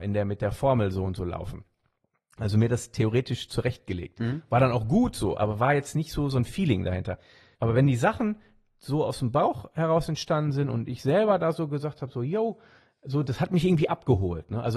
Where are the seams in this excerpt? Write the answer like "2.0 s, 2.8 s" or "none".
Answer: 7.5 s